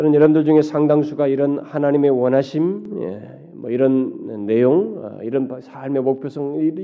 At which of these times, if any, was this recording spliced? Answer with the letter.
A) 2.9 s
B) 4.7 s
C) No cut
C